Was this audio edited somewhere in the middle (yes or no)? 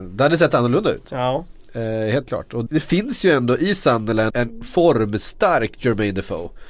yes